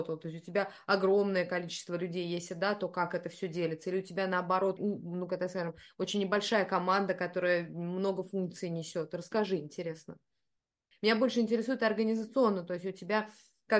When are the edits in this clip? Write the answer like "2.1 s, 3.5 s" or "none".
4.8 s, 10.9 s

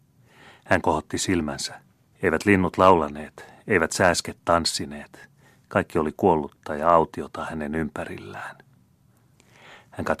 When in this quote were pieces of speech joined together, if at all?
2.1 s

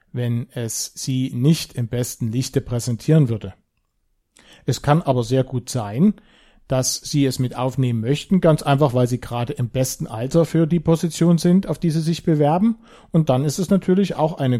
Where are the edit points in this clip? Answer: none

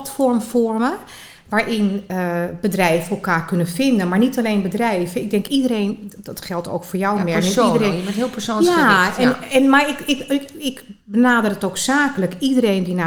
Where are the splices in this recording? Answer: none

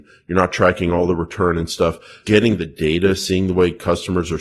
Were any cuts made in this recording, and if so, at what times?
2.2 s

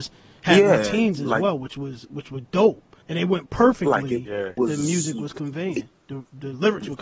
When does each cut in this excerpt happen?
3.0 s, 4.6 s

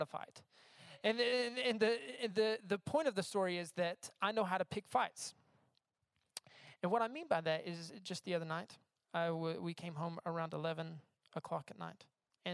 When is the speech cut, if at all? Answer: none

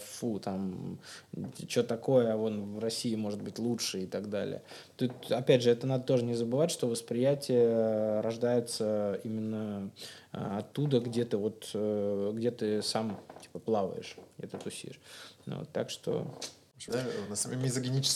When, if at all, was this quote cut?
16.9 s

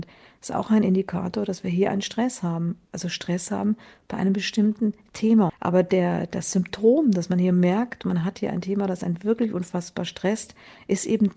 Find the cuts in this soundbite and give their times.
5.5 s

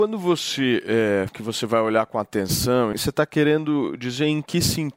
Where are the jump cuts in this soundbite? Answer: 1.3 s, 2.9 s

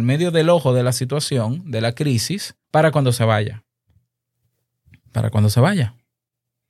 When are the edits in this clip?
2.6 s

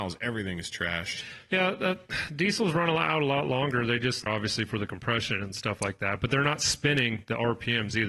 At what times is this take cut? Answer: 4.3 s

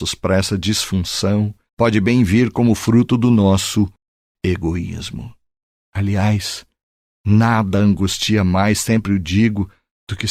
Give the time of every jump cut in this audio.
1.7 s, 5.9 s

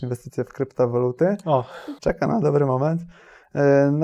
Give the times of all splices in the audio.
2.0 s

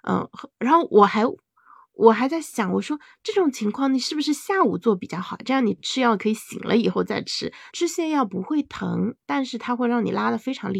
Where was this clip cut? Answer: 7.7 s

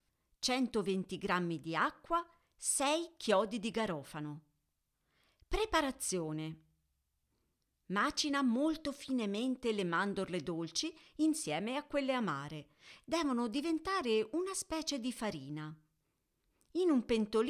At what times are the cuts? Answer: none

